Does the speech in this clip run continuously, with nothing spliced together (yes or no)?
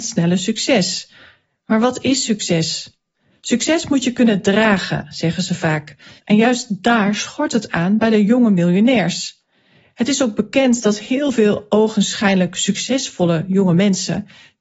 no